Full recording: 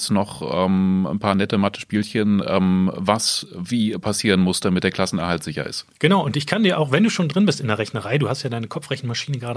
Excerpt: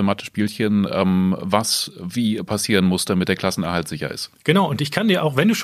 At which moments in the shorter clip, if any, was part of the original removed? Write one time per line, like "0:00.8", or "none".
none